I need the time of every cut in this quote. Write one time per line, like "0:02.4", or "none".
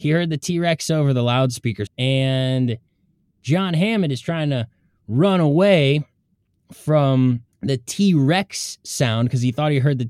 0:01.9
0:07.5